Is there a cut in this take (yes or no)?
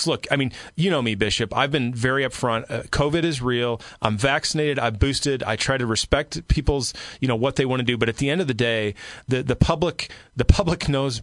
no